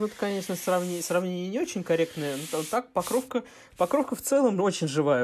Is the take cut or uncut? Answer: uncut